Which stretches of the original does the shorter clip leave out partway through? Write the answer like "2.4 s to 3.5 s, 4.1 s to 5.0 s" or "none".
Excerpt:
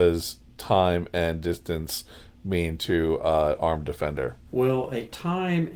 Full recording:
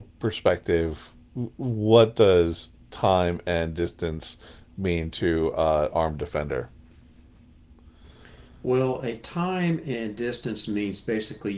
6.8 s to 8.6 s

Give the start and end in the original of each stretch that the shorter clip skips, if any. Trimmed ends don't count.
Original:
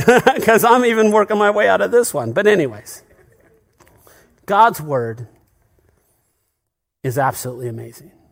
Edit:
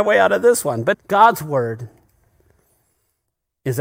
2.4 s to 4.3 s

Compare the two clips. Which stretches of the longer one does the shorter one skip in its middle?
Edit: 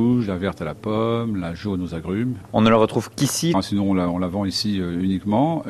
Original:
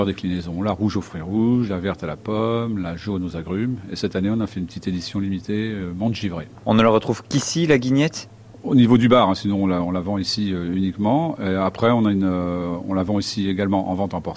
3.8 s to 6.5 s, 7.7 s to 9.3 s

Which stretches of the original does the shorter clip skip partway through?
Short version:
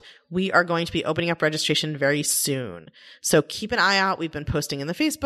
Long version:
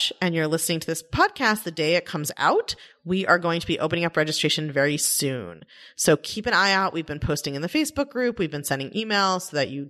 none

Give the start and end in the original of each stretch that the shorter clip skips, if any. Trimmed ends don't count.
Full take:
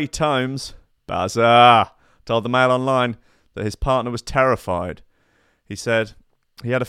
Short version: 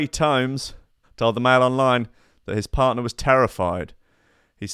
1.0 s to 2.1 s

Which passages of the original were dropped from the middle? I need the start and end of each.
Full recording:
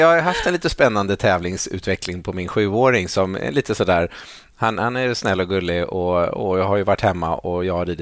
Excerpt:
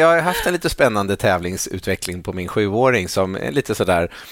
none

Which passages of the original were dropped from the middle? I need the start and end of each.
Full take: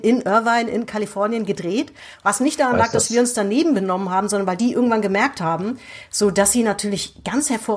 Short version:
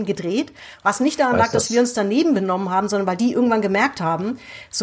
none

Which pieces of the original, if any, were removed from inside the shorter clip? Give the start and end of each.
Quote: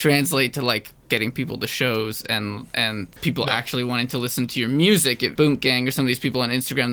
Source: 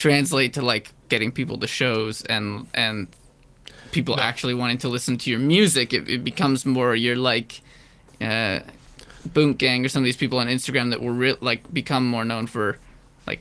3.2 s to 3.9 s, 6.1 s to 9.3 s

